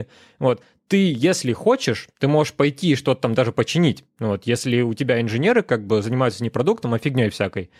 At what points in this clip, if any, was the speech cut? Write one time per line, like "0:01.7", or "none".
none